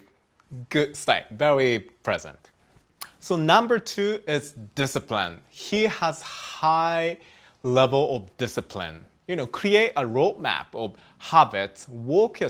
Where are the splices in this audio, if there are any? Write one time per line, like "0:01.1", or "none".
none